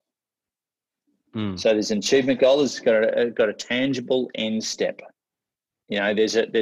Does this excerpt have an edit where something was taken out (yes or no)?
no